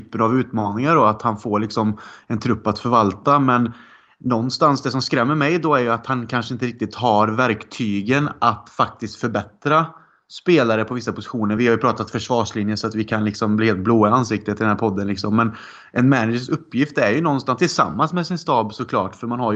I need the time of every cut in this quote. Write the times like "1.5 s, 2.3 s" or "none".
none